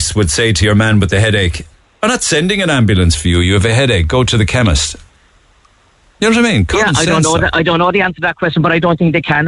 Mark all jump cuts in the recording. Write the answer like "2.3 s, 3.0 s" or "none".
none

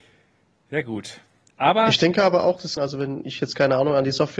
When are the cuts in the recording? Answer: 2.8 s

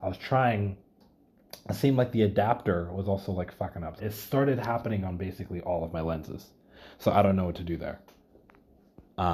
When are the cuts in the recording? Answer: 4.0 s

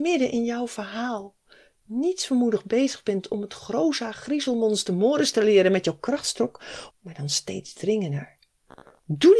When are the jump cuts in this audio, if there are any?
6.9 s

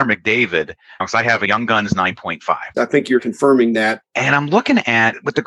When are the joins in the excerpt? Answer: 2.7 s, 4.0 s

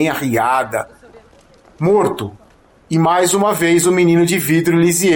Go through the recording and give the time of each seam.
none

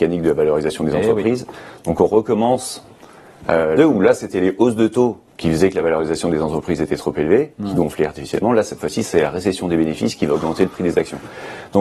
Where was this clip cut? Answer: 3.8 s, 5.3 s

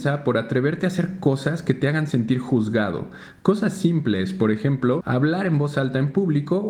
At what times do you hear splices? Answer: 5.0 s

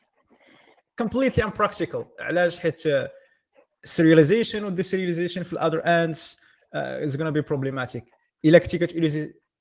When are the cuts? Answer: none

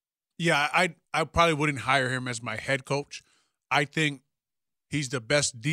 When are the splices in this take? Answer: 1.1 s

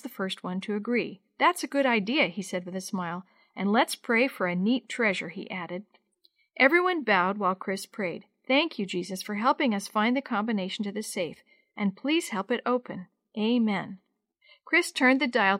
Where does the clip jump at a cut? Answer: none

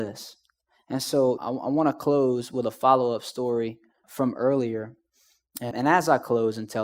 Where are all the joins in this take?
1.4 s, 4.0 s, 5.7 s

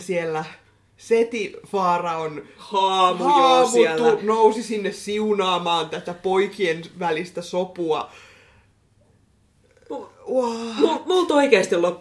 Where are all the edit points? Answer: none

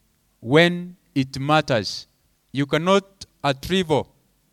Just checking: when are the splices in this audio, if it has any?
2.4 s

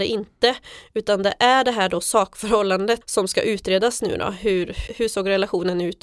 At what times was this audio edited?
3.0 s, 4.9 s

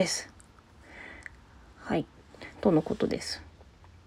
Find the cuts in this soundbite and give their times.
2.5 s

